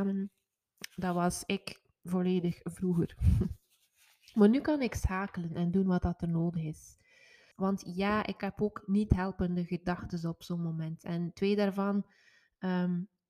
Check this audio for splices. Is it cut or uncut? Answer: cut